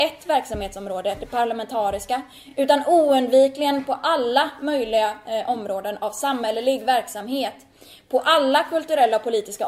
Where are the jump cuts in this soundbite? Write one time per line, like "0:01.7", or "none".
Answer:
none